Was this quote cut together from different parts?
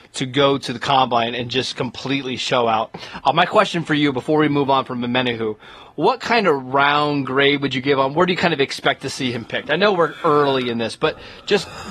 no; 0 cuts

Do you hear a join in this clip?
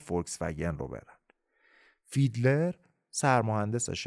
no; 0 cuts

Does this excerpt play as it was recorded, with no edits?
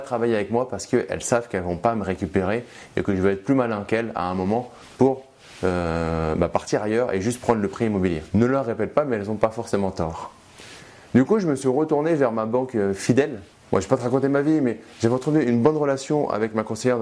yes; 0 cuts

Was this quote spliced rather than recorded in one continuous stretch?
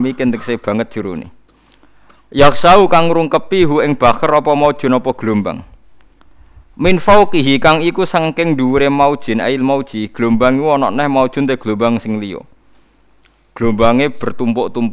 no; 0 cuts

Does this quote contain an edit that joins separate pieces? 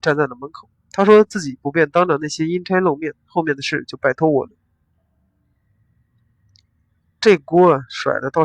no; 0 cuts

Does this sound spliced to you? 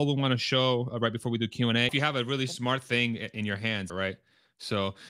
yes; 2 cuts; at 1.9 s, 3.9 s

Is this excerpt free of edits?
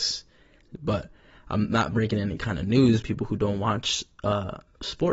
no; 1 cut; at 3.0 s

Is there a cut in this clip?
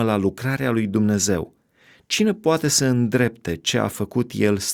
no; 0 cuts

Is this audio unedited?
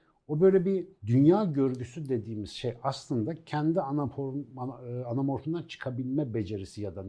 no; 1 cut; at 1.0 s

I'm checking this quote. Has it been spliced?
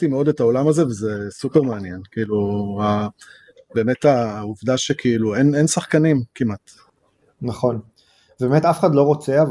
no; 0 cuts

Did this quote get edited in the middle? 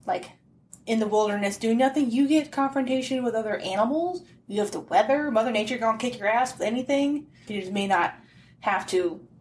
yes; 1 cut; at 7.5 s

